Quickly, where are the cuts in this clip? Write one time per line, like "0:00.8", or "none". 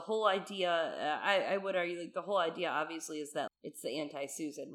0:03.5